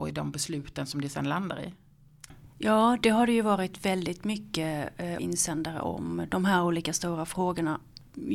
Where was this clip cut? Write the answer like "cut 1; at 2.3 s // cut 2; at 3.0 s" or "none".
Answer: cut 1; at 2.3 s // cut 2; at 5.2 s